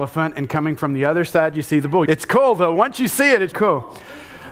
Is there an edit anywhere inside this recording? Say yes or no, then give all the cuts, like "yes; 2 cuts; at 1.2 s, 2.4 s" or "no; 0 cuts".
yes; 2 cuts; at 2.1 s, 3.5 s